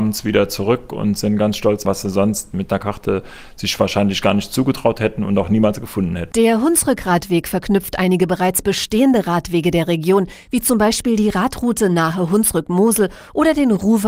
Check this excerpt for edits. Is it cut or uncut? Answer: cut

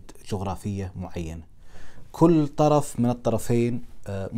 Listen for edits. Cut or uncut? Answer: uncut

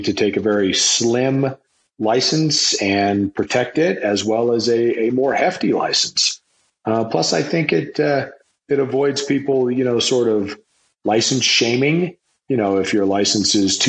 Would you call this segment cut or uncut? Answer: uncut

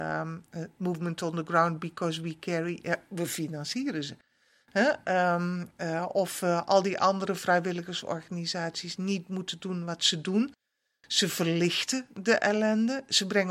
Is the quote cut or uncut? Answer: uncut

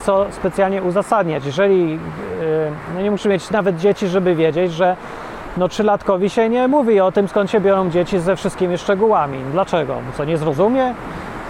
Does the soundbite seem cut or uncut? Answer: uncut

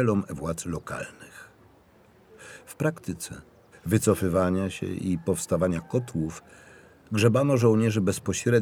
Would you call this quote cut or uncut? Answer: cut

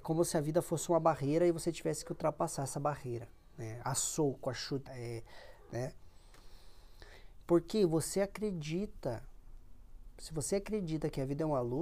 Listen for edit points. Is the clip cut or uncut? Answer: cut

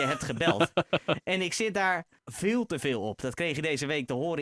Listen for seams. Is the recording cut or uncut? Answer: cut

